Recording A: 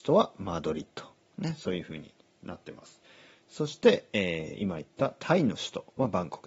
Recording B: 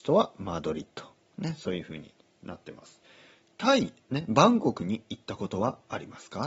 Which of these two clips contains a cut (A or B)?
B